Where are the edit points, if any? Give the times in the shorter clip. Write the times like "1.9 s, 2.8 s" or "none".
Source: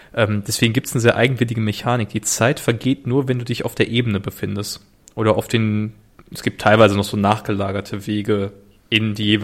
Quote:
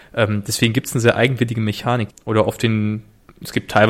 2.1 s